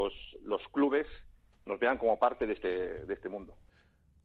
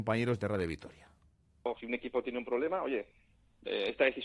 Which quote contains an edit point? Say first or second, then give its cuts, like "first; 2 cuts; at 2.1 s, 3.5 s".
second; 1 cut; at 1.8 s